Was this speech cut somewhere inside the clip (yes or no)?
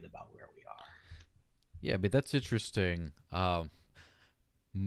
no